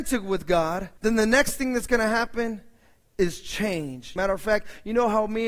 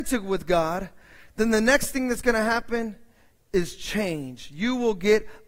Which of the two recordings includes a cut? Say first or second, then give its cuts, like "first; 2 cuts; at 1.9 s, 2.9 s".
first; 2 cuts; at 1.0 s, 4.2 s